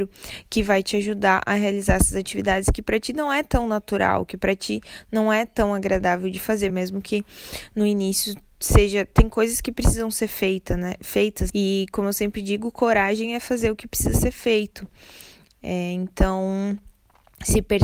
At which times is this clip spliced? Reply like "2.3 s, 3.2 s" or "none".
6.7 s, 11.5 s